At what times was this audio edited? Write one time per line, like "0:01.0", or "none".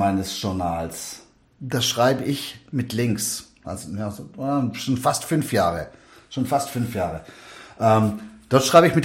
0:03.6

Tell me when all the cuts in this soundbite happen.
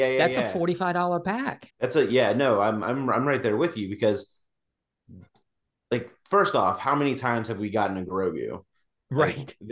0:01.7

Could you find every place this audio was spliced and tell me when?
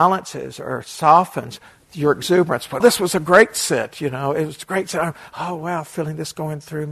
0:02.8

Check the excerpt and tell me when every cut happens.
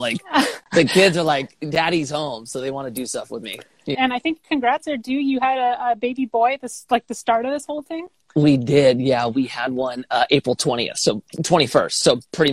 0:03.9

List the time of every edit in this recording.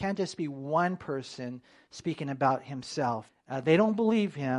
0:03.3

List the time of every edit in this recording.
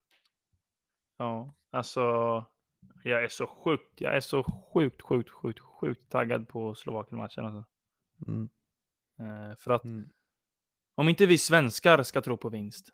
0:09.0

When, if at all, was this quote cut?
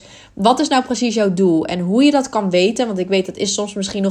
none

